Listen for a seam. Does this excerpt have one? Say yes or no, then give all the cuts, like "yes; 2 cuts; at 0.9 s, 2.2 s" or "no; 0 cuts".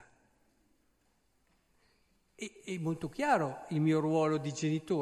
no; 0 cuts